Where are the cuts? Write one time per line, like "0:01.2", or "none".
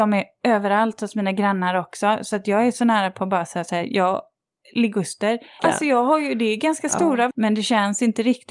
0:05.6
0:07.3